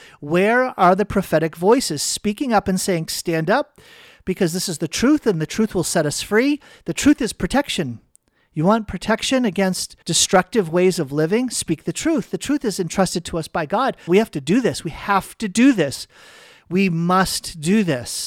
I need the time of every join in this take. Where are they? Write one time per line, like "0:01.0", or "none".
0:03.1
0:10.0
0:14.1